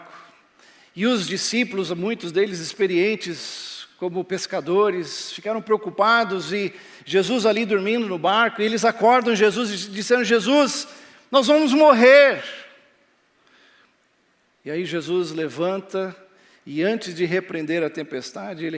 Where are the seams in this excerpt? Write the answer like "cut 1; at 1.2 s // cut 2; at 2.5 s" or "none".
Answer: none